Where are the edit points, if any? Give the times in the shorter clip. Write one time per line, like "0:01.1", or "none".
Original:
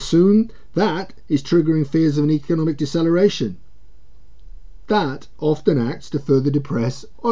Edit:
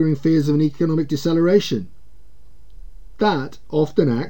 none